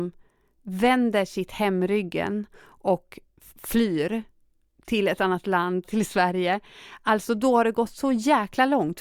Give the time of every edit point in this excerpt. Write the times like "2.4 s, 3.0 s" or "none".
5.8 s